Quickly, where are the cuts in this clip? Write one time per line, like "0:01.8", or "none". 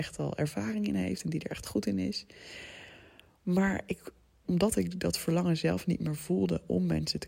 0:04.4